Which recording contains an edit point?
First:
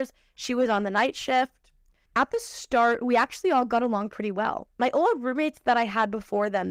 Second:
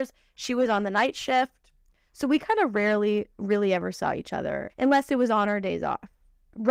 first; 1 cut; at 2.1 s

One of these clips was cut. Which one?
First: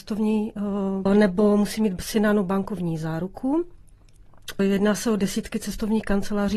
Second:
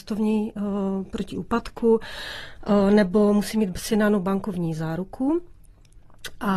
first; 2 cuts; at 1.1 s, 4.6 s

